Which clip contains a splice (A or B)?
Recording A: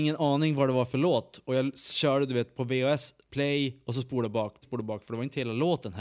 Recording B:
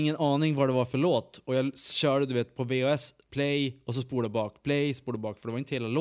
A